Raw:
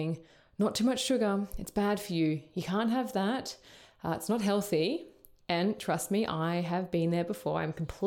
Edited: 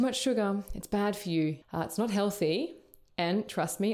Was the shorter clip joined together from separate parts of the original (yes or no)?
yes